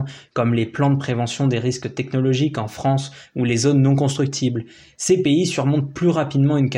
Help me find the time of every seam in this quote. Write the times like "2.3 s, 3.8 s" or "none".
none

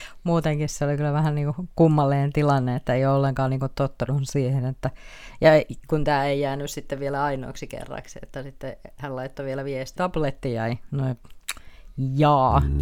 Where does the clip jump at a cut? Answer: 10.0 s

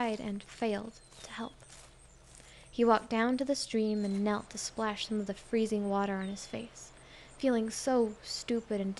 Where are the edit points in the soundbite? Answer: none

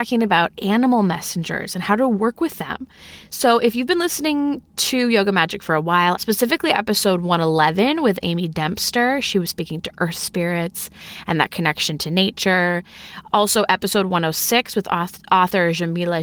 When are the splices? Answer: 6.1 s

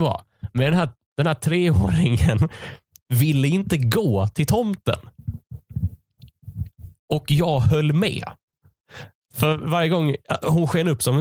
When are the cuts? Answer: none

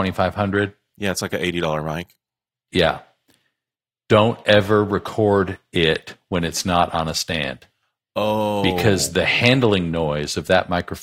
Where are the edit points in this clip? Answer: none

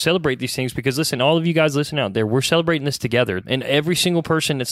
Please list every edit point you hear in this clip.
3.4 s

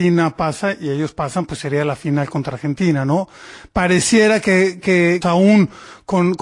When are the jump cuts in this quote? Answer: 5.2 s

